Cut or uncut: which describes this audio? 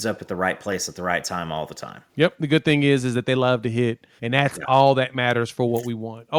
cut